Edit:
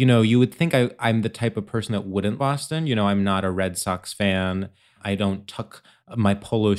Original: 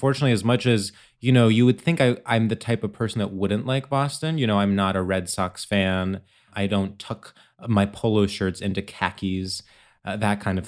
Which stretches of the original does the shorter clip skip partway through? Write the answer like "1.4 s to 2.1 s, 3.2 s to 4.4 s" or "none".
3.6 s to 3.9 s

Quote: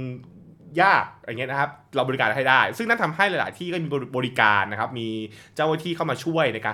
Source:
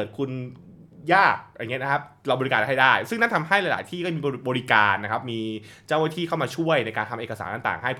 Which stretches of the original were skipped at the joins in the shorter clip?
none

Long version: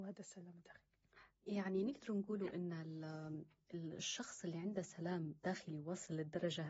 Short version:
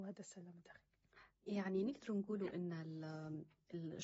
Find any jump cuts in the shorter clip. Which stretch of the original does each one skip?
none

